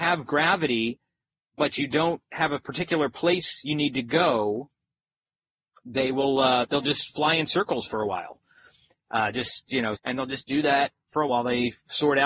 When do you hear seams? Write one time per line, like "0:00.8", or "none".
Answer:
0:09.9
0:11.3

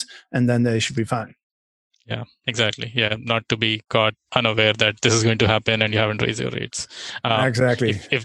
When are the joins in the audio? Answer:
none

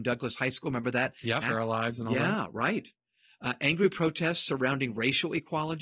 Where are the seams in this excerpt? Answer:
0:01.4

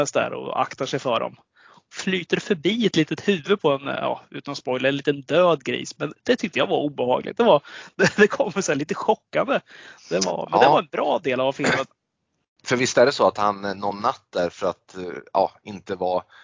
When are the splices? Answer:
none

